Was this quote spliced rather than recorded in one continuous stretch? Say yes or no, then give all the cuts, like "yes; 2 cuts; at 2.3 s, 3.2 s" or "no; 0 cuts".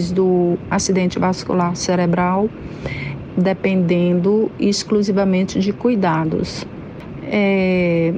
yes; 1 cut; at 3.3 s